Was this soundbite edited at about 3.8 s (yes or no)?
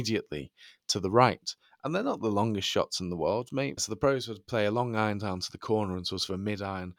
yes